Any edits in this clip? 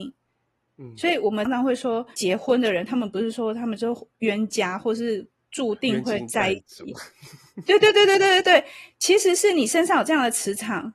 yes; 1 cut; at 1.5 s

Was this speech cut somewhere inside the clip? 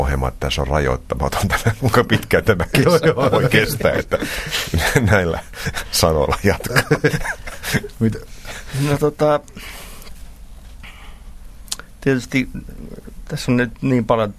no; 0 cuts

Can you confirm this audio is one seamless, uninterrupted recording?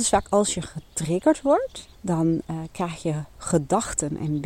no; 1 cut; at 1.9 s

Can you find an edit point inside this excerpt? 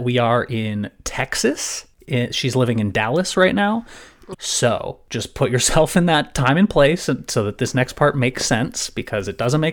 yes; 1 cut; at 4.3 s

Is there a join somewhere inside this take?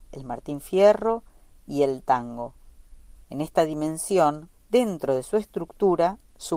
yes; 2 cuts; at 3.2 s, 4.5 s

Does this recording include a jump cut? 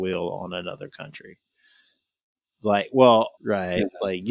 yes; 1 cut; at 3.4 s

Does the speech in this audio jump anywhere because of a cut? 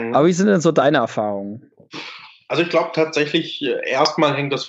no; 0 cuts

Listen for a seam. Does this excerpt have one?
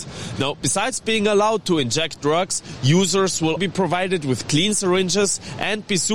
yes; 1 cut; at 3.6 s

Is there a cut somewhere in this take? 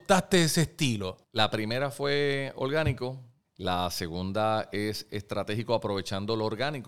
yes; 2 cuts; at 1.2 s, 3.4 s

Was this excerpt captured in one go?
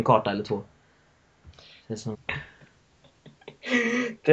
no; 1 cut; at 2.1 s

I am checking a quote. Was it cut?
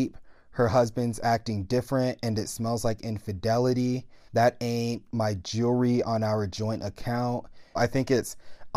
yes; 2 cuts; at 4.3 s, 7.8 s

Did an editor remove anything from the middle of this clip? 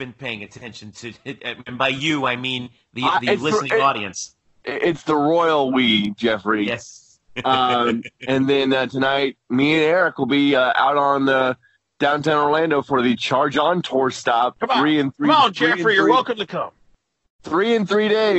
no; 0 cuts

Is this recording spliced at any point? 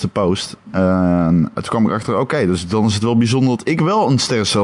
yes; 1 cut; at 1.5 s

